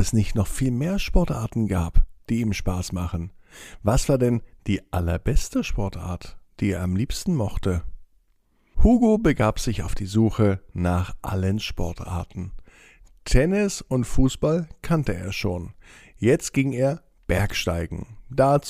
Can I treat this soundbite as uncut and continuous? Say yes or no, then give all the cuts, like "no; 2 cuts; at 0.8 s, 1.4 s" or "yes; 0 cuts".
yes; 0 cuts